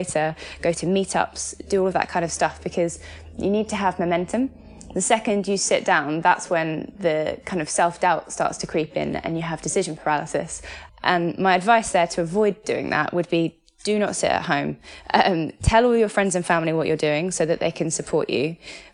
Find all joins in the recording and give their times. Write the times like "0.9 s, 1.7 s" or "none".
10.9 s

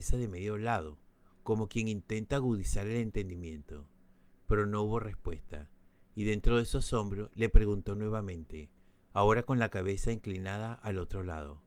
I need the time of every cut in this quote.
none

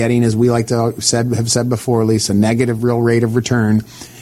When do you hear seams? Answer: none

